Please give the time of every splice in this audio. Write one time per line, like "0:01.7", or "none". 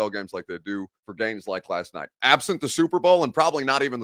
0:01.0